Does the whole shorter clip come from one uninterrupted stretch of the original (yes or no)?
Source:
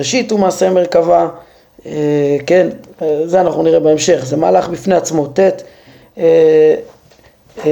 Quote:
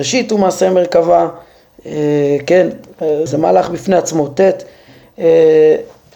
no